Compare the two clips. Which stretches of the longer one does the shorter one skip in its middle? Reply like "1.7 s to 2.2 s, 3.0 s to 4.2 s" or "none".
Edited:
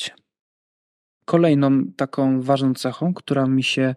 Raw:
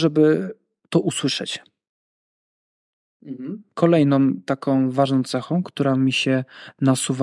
2.7 s to 3.7 s